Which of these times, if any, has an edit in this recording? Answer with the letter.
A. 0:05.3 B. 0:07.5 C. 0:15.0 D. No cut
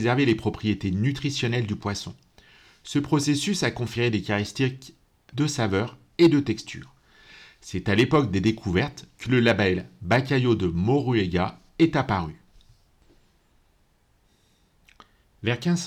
A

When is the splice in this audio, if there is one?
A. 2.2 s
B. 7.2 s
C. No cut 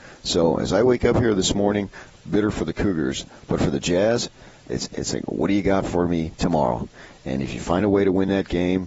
A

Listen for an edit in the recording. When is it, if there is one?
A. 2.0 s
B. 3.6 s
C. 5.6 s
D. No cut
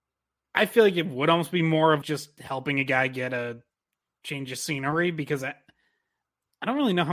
A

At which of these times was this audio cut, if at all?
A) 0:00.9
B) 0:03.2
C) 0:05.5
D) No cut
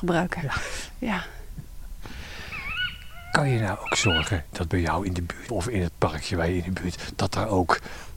C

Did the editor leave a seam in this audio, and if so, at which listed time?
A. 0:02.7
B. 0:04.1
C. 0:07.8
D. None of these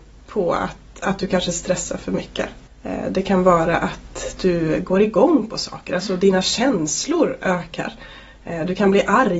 A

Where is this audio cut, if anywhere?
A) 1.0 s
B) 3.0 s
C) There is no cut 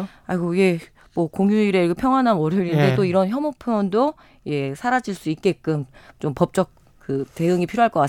B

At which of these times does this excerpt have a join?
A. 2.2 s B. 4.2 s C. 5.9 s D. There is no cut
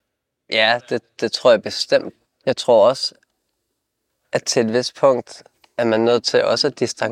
A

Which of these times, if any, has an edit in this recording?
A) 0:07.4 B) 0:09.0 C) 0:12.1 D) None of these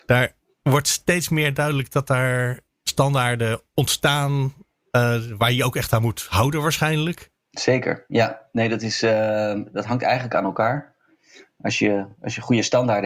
D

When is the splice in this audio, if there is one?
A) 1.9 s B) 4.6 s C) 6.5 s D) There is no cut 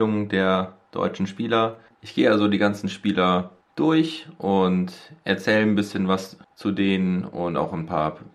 A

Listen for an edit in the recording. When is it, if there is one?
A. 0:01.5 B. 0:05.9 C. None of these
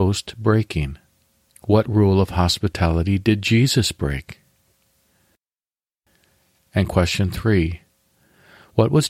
A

